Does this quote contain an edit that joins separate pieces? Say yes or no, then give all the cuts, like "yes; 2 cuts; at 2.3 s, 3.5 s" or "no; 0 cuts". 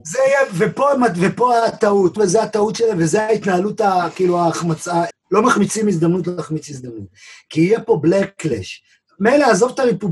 yes; 2 cuts; at 2.2 s, 5.1 s